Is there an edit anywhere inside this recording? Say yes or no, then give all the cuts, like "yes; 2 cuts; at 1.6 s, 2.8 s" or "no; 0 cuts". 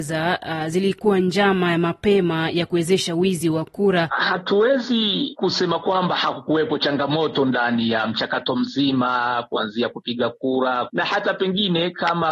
yes; 2 cuts; at 4.1 s, 10.9 s